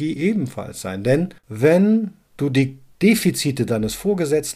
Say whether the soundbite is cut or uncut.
cut